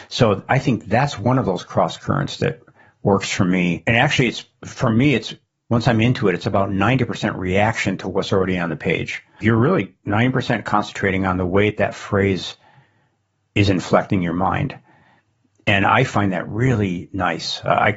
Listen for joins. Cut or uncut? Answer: cut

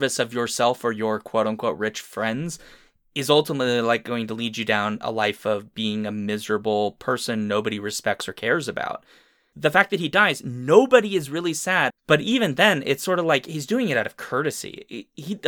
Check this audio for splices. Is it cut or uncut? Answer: cut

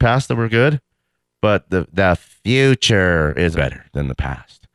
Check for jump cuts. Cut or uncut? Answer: cut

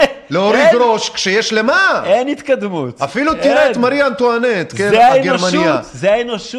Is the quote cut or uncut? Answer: uncut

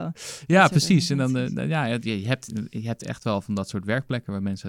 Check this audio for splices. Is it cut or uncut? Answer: uncut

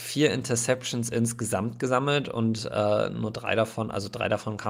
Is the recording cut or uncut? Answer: uncut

